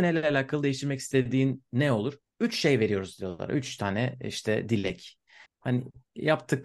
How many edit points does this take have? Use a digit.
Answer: 1